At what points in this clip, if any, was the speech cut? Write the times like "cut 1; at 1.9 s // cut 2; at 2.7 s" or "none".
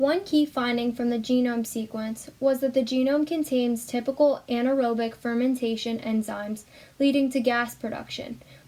none